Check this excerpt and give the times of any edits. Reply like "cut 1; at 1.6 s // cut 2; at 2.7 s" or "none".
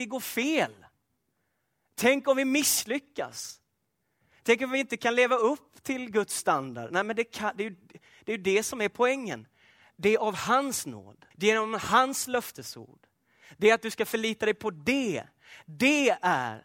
cut 1; at 11.3 s